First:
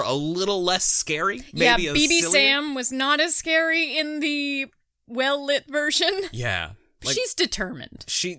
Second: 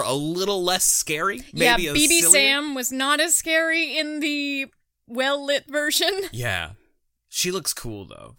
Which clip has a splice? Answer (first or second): first